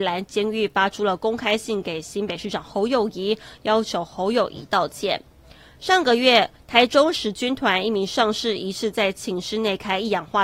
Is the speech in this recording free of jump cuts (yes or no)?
yes